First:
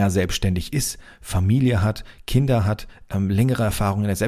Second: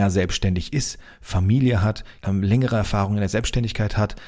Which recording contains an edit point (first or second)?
second